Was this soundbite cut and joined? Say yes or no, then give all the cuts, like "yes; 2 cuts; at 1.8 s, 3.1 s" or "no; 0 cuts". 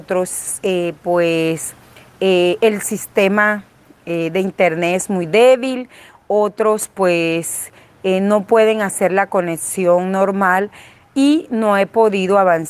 no; 0 cuts